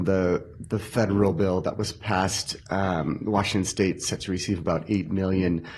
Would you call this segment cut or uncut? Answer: uncut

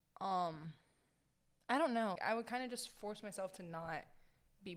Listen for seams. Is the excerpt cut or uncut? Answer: cut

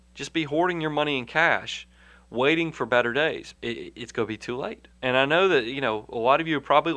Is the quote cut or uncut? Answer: cut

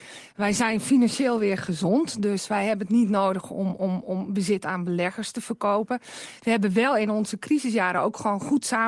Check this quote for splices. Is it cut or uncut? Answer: uncut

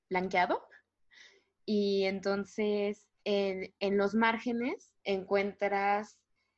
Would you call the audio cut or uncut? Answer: cut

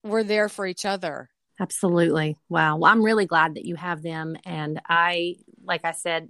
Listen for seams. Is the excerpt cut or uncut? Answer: cut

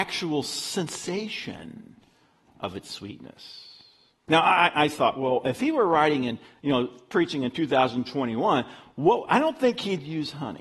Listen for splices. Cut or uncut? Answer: uncut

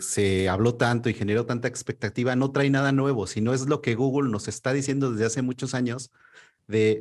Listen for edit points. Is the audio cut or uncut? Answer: uncut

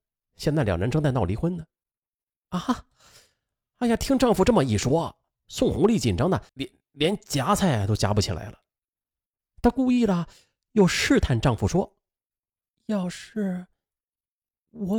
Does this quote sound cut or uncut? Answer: cut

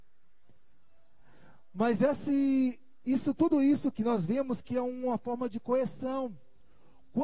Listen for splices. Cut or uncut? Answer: cut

